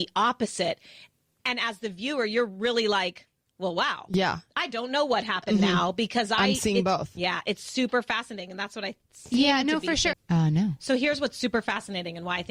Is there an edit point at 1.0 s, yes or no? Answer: no